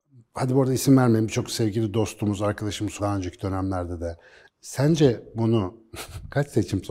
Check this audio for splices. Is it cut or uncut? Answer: cut